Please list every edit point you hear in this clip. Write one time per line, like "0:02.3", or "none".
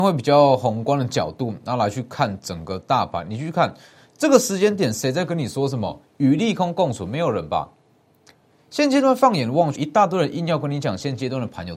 0:09.8